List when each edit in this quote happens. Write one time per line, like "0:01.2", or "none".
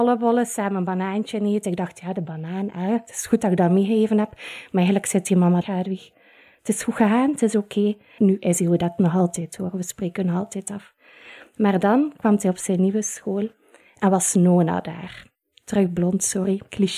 0:05.6
0:08.2